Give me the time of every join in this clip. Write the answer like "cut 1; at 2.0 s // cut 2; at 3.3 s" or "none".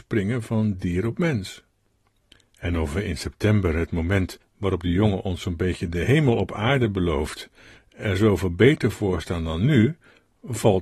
none